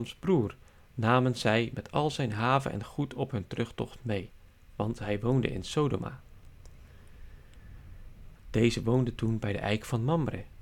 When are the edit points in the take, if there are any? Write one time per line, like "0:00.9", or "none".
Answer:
0:08.3